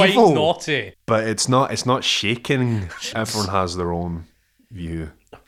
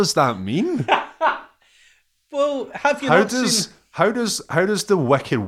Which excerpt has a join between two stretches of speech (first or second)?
first